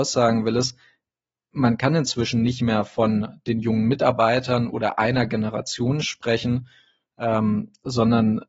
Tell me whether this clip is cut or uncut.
uncut